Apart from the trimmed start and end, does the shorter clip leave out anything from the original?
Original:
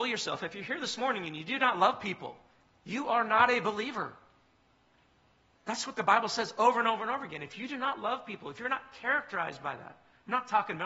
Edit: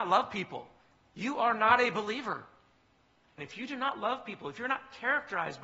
yes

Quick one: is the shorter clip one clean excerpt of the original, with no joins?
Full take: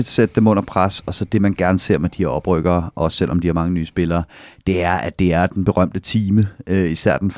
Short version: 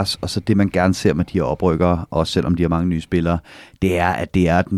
yes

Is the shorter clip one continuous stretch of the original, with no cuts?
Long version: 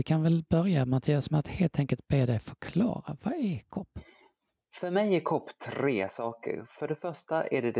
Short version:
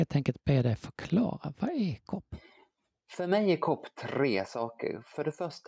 yes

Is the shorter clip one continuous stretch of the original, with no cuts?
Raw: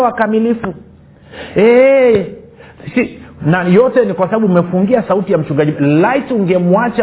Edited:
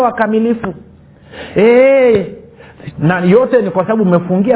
no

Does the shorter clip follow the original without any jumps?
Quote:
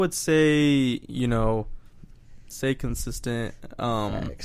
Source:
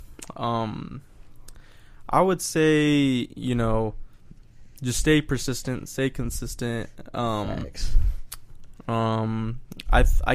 no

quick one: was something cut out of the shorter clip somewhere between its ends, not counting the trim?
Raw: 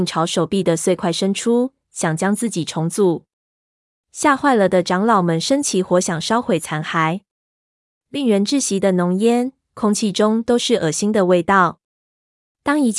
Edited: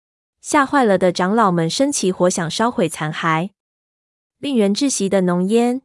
no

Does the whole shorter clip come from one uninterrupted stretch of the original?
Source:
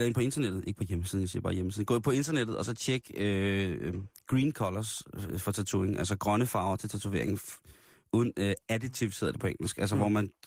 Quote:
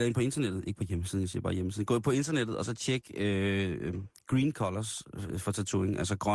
yes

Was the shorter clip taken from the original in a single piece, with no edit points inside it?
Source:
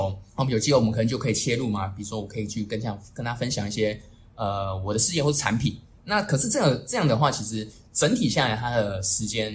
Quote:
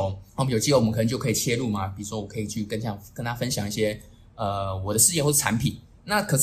yes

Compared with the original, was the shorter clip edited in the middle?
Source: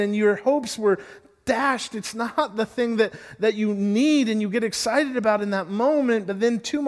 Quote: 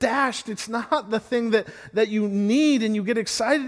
no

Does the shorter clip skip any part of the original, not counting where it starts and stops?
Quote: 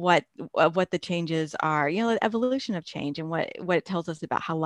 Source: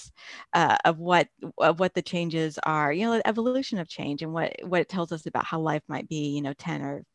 no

